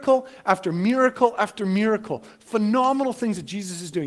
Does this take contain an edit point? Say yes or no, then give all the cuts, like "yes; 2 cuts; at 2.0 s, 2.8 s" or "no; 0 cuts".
no; 0 cuts